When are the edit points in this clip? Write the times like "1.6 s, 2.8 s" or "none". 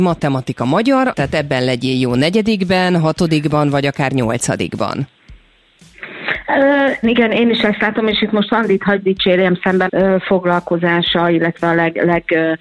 1.1 s, 7.0 s, 9.9 s